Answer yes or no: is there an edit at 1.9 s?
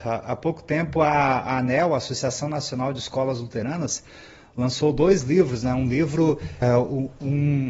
no